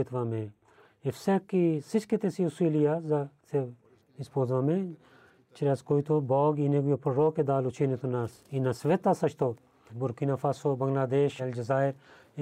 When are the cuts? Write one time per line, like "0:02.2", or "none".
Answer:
0:09.9
0:11.4